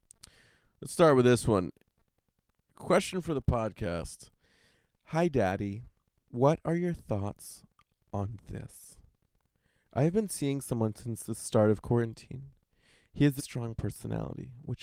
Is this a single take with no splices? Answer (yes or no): no